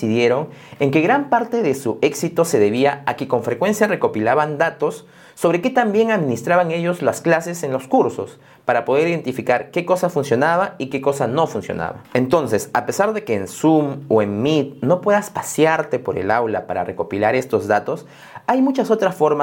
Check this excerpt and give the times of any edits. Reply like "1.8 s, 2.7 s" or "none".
none